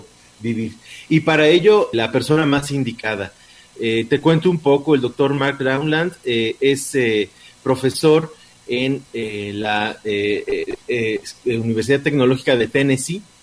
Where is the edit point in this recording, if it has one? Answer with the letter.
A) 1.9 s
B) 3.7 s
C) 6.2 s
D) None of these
A